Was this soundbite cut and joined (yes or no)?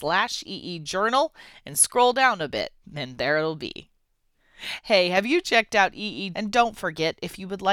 yes